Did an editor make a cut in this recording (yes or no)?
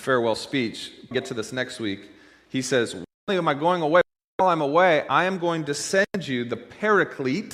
yes